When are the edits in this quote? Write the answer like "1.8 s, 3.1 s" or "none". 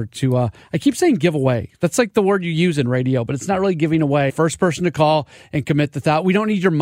4.3 s